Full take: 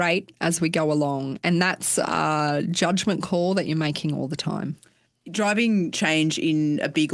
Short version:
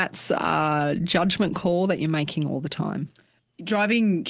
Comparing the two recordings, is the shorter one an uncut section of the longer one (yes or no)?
yes